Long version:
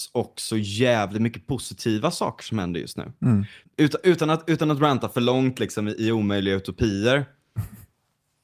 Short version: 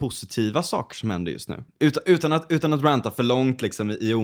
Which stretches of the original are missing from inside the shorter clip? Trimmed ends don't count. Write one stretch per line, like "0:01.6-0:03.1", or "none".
0:03.2-0:03.7

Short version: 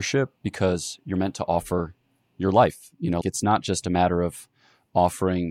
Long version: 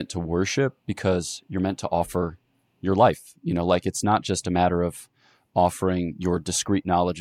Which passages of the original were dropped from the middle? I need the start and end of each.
0:03.6-0:03.8

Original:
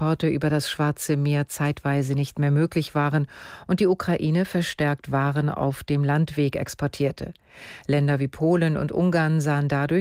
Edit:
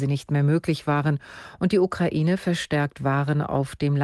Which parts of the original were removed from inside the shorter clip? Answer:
none

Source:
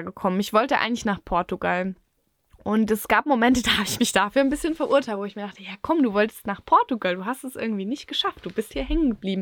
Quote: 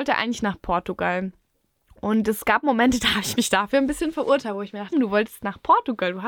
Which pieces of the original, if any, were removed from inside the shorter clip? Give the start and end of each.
0:05.5-0:05.9

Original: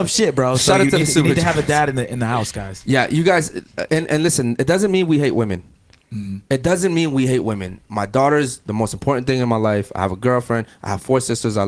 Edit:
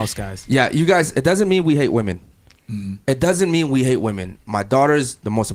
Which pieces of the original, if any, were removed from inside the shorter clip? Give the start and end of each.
0:03.5-0:04.6

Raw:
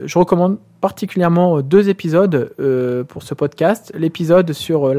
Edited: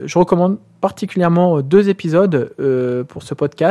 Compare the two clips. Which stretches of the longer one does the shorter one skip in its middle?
none

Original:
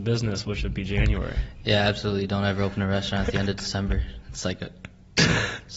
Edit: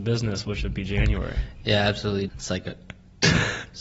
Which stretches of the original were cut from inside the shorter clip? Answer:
0:02.3-0:04.2

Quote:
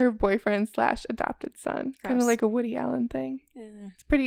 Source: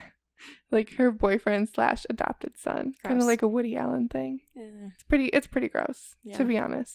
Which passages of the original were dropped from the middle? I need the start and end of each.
none

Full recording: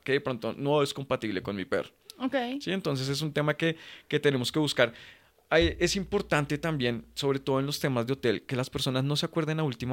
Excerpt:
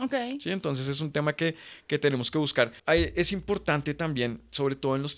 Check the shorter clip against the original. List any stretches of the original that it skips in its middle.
0:05.0-0:05.4

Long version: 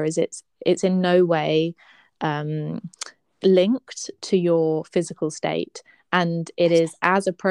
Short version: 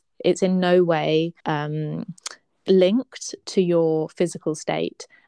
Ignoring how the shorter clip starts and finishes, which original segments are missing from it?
0:01.8-0:02.2

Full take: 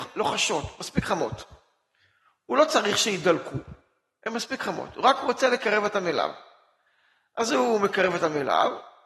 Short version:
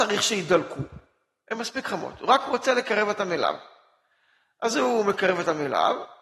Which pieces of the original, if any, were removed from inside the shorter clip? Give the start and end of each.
none

